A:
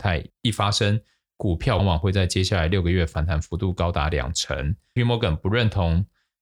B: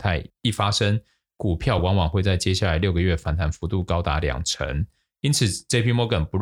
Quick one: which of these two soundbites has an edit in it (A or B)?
A